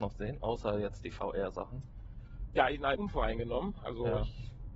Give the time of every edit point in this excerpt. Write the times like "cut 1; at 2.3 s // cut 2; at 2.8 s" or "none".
cut 1; at 3.0 s